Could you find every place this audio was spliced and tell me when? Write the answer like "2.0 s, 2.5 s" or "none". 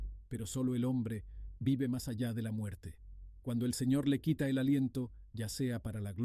5.3 s